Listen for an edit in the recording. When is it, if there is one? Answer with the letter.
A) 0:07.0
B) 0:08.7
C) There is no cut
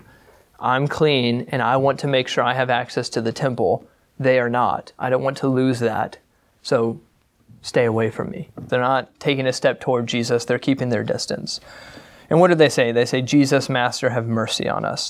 B